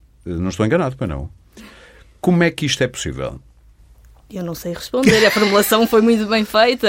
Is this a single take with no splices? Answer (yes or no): yes